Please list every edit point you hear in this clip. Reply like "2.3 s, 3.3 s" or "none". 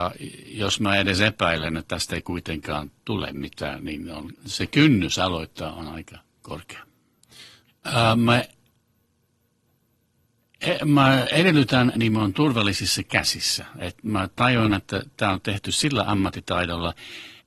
7.7 s, 11.9 s